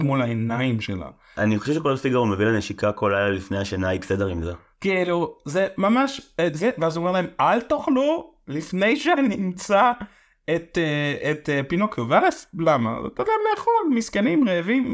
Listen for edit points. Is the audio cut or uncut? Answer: uncut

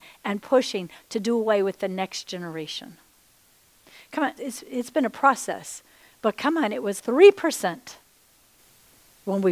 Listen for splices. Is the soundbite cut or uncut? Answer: cut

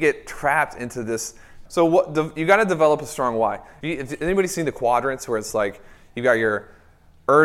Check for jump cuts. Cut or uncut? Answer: cut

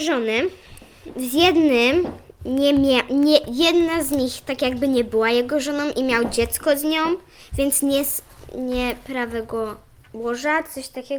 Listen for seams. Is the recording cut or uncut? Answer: uncut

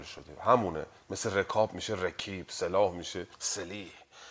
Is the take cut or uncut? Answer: cut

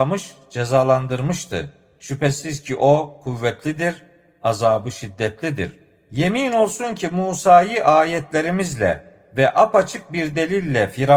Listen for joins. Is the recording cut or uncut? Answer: uncut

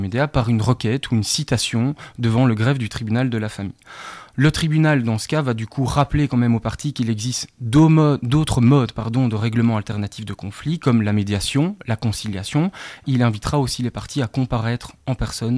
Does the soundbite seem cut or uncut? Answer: cut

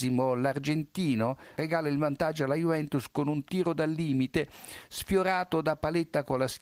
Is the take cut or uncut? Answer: cut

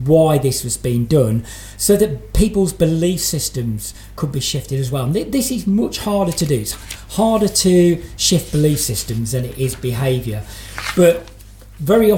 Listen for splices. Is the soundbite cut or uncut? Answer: uncut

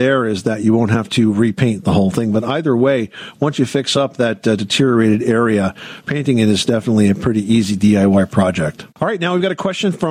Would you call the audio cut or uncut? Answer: cut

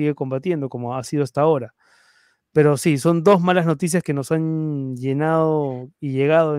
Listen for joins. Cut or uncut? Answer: uncut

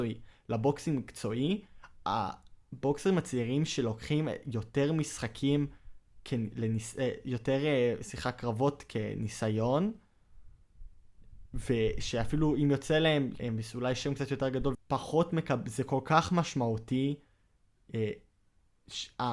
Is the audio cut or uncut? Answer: cut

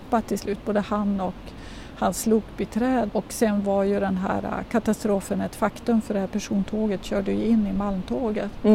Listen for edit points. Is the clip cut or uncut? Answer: cut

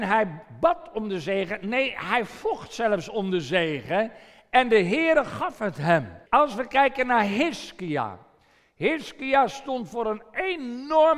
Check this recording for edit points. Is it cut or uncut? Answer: cut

